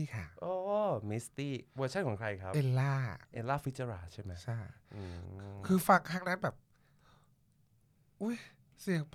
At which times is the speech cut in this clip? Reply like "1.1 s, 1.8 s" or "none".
3.2 s